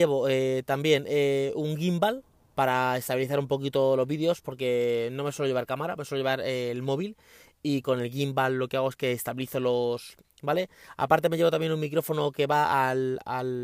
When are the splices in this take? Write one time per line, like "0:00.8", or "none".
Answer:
0:10.2